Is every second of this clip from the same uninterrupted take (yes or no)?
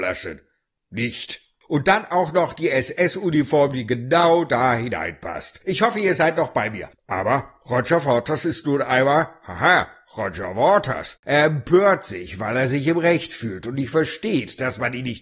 no